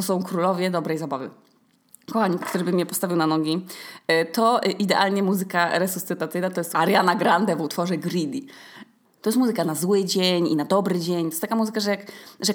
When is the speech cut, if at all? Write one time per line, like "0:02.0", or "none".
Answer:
0:02.4
0:06.7
0:09.0

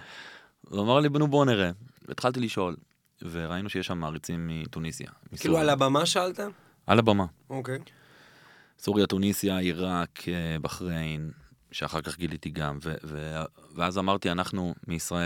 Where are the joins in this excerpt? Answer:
none

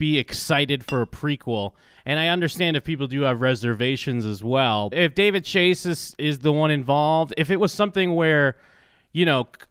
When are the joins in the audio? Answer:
0:04.9

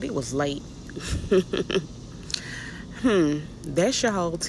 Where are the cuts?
0:00.9

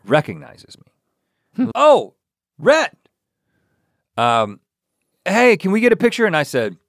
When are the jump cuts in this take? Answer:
0:01.7

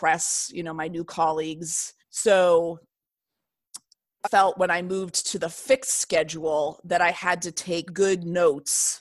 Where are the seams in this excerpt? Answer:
0:02.0
0:04.2
0:07.9

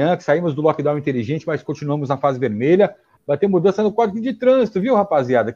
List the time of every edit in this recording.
0:03.2

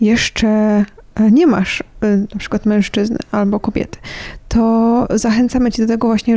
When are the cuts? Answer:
none

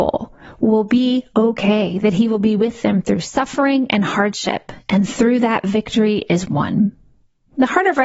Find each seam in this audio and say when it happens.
none

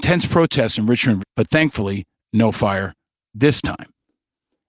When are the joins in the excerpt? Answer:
0:01.2

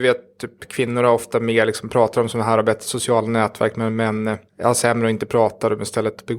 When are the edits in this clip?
0:04.5

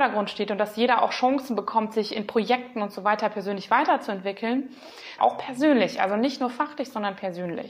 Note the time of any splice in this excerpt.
0:05.2

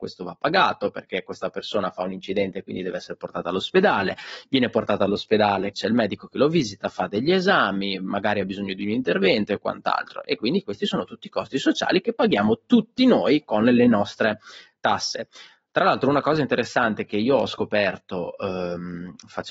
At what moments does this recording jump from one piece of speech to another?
0:05.7

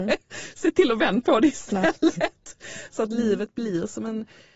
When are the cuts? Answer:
none

